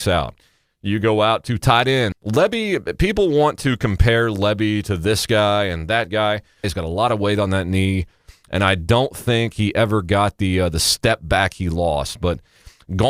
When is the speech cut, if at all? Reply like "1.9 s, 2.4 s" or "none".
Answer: 2.1 s, 6.6 s